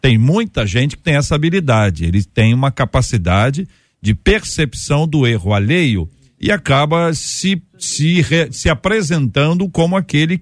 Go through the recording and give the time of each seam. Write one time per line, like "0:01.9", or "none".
none

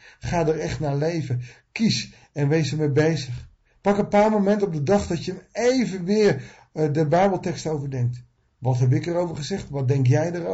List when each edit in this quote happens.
none

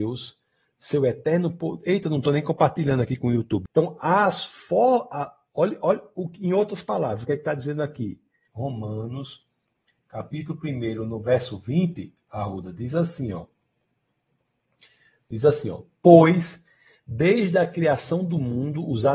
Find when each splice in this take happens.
0:03.7
0:08.5

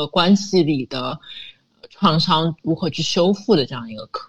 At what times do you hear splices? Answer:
none

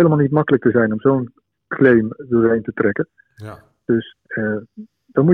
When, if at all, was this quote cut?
none

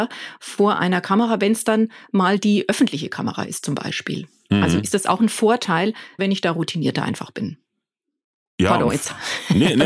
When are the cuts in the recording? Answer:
0:06.2

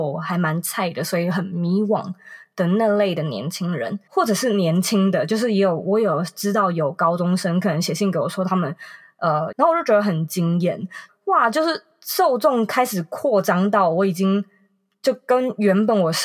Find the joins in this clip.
0:04.1
0:09.5
0:11.1

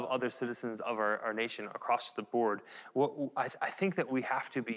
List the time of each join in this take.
none

